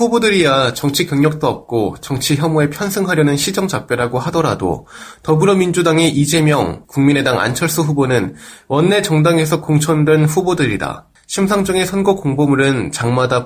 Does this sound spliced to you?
yes; 2 cuts; at 6.8 s, 11.2 s

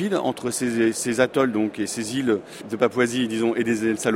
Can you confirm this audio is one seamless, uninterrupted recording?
yes; 0 cuts

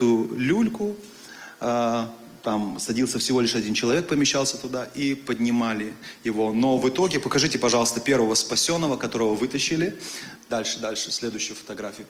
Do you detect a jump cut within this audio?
yes; 1 cut; at 10.4 s

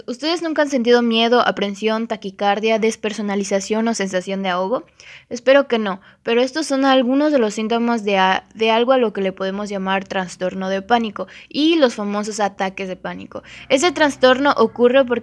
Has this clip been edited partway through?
no; 0 cuts

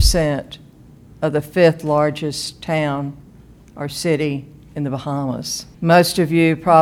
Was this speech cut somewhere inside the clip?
yes; 1 cut; at 5.7 s

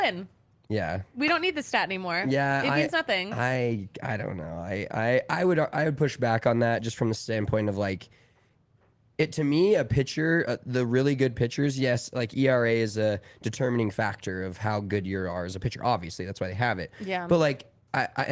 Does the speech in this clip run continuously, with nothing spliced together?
yes; 0 cuts

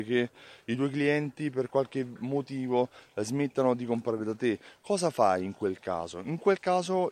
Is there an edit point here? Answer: no; 0 cuts

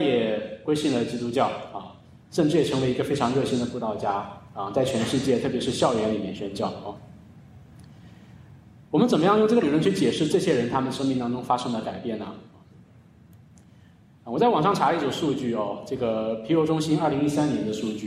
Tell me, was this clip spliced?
no; 0 cuts

